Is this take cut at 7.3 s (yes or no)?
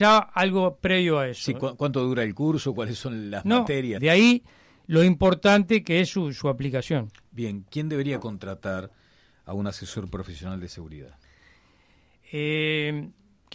no